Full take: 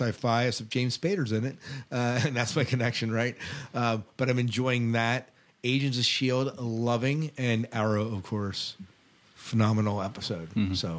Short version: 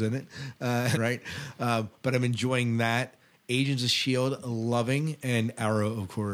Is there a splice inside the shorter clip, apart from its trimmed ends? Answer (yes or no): yes